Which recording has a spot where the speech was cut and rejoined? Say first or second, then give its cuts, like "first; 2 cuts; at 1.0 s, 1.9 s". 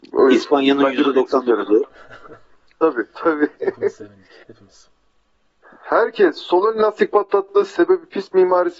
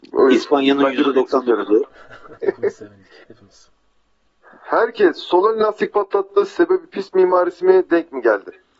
second; 1 cut; at 2.4 s